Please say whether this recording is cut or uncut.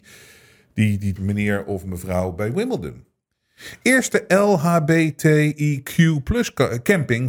cut